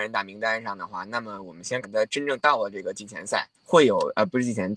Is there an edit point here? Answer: yes; 2 cuts; at 1.8 s, 3.5 s

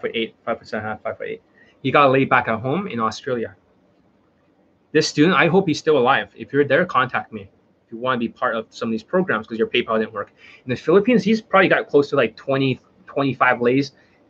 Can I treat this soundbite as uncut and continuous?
yes; 0 cuts

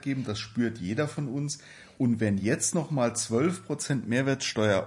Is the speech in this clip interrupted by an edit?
no; 0 cuts

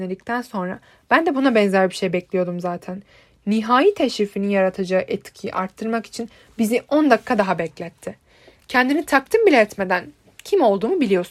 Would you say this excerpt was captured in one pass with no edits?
yes; 0 cuts

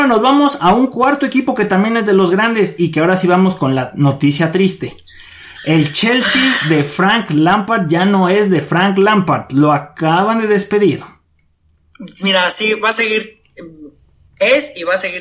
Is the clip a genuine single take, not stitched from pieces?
yes; 0 cuts

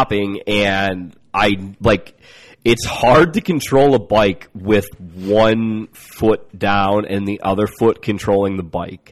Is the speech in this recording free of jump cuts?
yes; 0 cuts

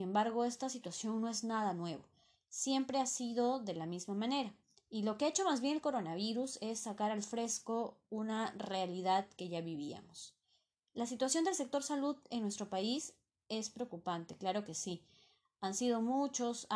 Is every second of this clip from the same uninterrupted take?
yes; 0 cuts

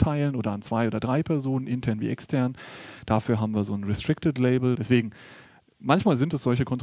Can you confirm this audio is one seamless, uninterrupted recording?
no; 1 cut; at 4.7 s

